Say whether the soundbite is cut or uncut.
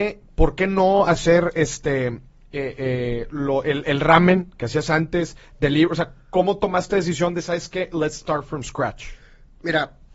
uncut